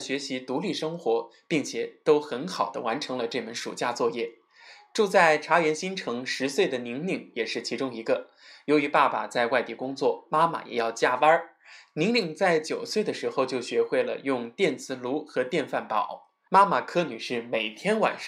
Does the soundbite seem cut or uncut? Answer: cut